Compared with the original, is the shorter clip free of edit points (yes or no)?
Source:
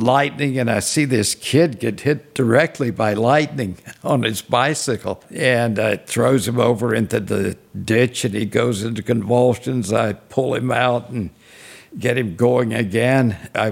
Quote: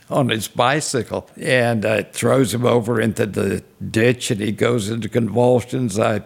yes